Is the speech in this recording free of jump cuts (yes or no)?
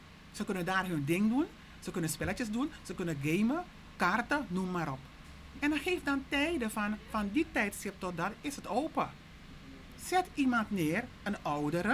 yes